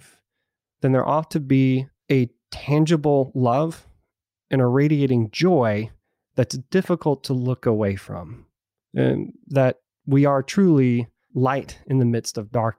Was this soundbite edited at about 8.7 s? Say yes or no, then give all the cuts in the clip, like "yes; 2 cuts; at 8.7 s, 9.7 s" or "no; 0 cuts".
no; 1 cut; at 11.3 s